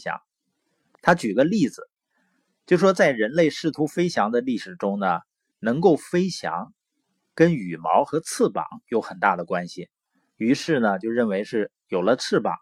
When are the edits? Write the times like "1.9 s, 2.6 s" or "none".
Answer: 0.9 s, 5.5 s